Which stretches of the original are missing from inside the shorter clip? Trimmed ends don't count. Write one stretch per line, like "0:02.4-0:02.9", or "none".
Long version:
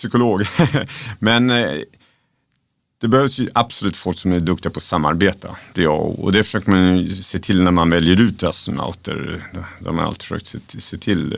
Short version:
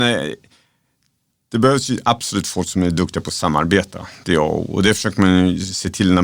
none